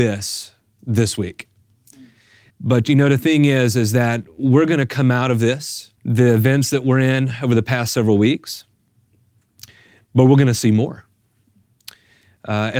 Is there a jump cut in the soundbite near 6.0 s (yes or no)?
yes